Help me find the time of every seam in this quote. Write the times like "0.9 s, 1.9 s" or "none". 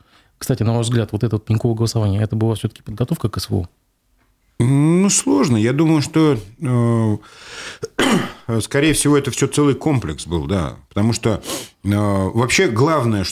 none